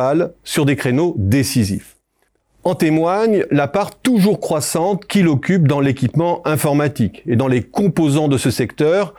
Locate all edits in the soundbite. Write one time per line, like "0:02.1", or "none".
none